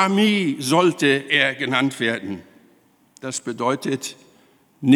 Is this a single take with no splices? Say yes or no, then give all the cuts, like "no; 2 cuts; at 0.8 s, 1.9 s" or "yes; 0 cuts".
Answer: yes; 0 cuts